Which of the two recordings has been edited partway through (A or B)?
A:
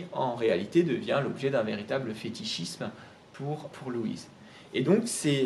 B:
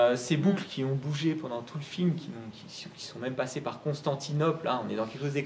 A